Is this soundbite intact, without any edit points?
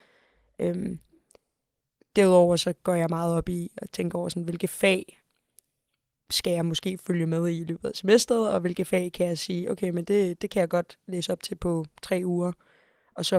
yes; 0 cuts

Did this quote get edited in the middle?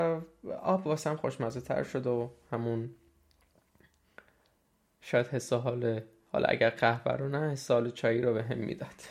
no; 0 cuts

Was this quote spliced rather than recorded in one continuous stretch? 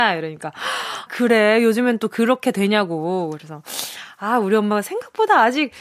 yes; 1 cut; at 1.1 s

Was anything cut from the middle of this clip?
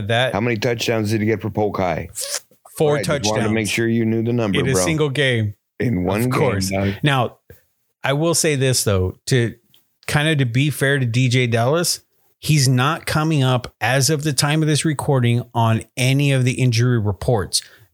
no; 0 cuts

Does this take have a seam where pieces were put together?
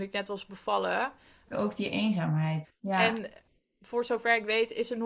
yes; 2 cuts; at 1.5 s, 2.6 s

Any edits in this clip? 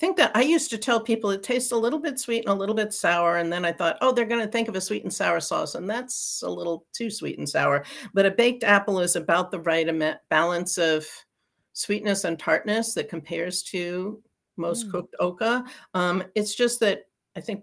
no; 0 cuts

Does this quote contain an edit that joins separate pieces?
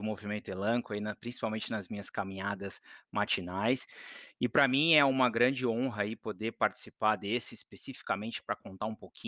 no; 0 cuts

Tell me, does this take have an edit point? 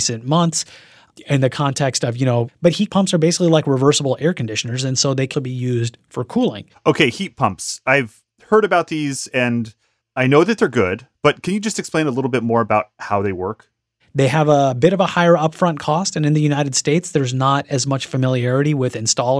yes; 2 cuts; at 2.5 s, 5.3 s

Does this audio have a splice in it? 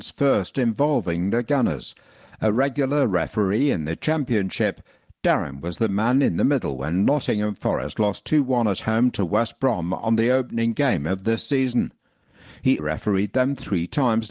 yes; 1 cut; at 12.8 s

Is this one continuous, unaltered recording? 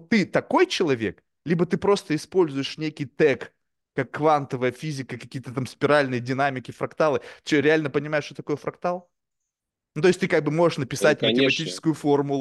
yes; 0 cuts

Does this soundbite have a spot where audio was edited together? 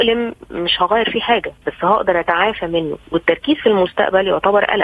yes; 1 cut; at 3.0 s

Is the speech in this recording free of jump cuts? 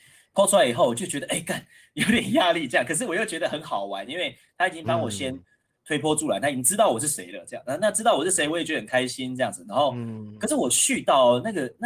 yes; 0 cuts

